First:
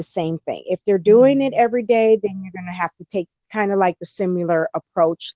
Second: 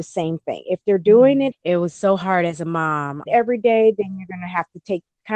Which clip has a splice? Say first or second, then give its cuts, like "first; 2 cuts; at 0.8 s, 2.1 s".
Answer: second; 2 cuts; at 1.5 s, 3.3 s